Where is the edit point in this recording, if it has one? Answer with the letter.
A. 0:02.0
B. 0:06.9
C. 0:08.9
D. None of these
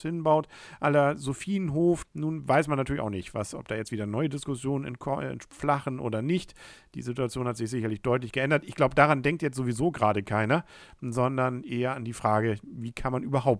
A